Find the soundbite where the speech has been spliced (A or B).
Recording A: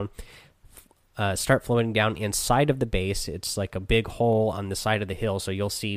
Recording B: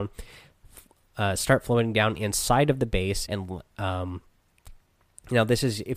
B